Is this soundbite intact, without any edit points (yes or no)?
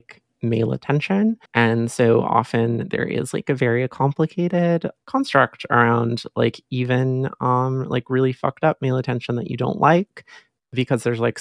no